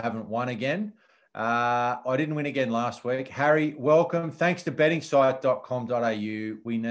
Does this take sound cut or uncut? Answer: uncut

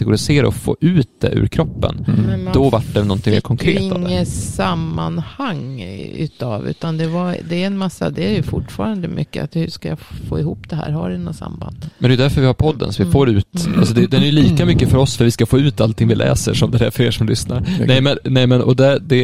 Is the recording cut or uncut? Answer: uncut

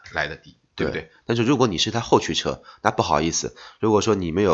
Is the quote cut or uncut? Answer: cut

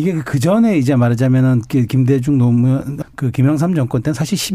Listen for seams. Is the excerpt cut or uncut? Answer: cut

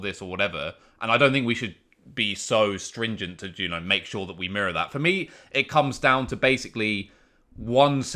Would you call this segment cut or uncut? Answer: uncut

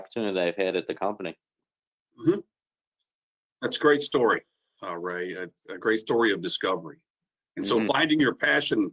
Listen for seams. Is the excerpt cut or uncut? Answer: uncut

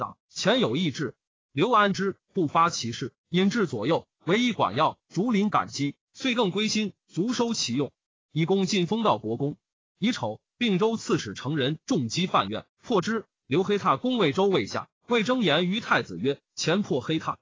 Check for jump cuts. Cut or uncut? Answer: cut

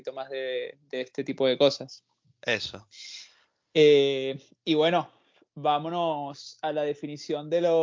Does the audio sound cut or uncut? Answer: uncut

